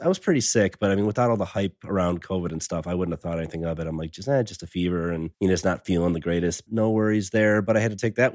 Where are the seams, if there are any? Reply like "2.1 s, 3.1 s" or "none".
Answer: 5.3 s, 6.7 s